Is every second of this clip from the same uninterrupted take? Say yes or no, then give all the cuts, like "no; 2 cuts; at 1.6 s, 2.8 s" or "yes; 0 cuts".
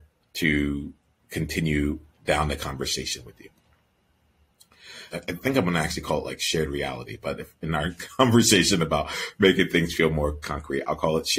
no; 1 cut; at 5.1 s